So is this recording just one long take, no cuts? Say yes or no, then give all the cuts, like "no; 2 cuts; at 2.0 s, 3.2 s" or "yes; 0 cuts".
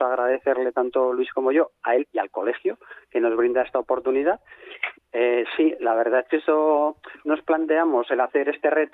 no; 2 cuts; at 4.9 s, 7.2 s